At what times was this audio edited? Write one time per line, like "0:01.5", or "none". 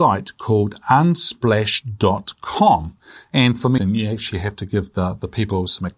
0:03.8